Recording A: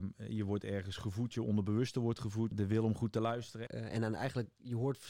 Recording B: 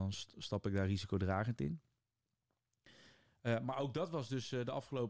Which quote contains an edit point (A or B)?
A